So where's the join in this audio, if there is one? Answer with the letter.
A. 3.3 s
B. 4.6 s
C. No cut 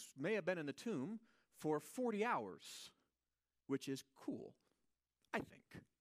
C